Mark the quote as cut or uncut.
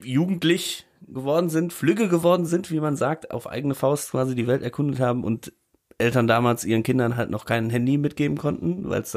uncut